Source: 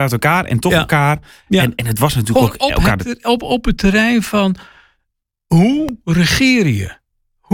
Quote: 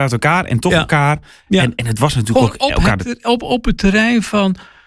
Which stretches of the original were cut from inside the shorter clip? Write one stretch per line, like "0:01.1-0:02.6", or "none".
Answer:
none